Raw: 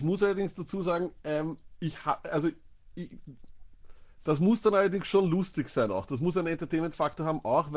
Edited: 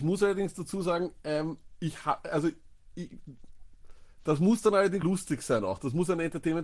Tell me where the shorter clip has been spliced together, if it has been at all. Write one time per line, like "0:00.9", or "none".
0:05.0

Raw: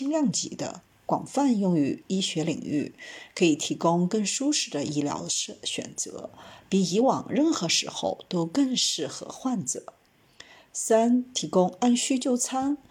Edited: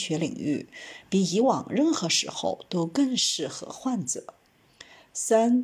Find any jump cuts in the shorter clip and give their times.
0:01.0

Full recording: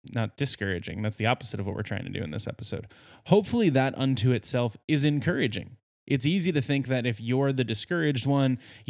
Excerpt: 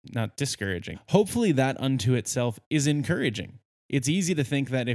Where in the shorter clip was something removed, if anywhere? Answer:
0:00.9

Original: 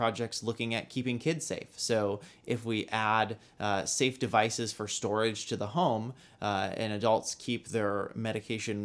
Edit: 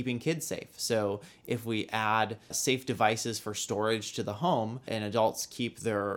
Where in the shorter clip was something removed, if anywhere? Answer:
0:02.5
0:04.9

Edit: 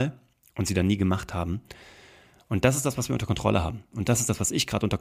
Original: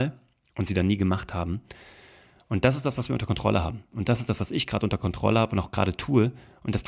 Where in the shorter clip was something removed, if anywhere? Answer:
none

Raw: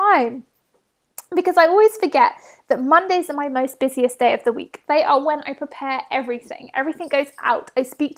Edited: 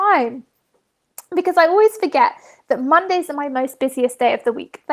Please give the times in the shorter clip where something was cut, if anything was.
none

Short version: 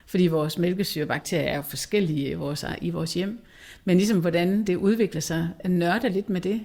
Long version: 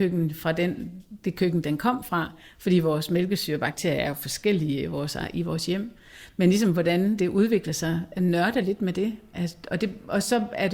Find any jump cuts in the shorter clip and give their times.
none

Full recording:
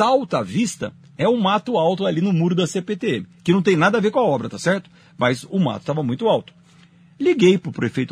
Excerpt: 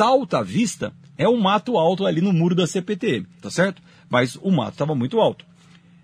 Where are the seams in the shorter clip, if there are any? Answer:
0:03.4

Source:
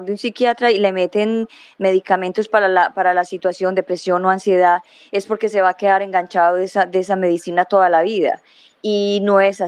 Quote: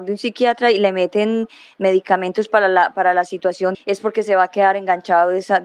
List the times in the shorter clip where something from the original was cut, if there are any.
0:03.7

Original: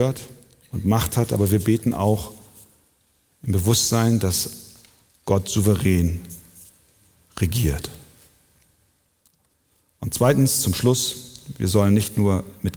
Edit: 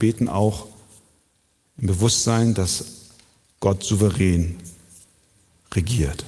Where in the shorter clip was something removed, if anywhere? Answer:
none

